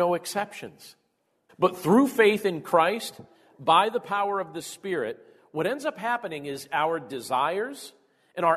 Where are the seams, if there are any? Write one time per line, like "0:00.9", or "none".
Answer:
0:01.5